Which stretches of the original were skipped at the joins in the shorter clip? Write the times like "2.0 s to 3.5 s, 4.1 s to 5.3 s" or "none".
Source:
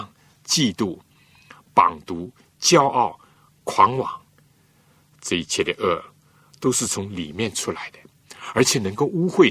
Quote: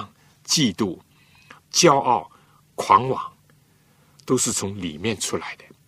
1.6 s to 2.5 s, 5.0 s to 6.5 s